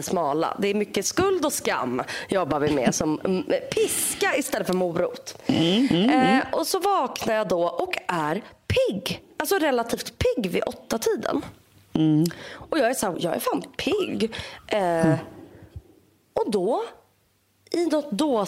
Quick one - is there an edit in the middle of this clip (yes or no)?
yes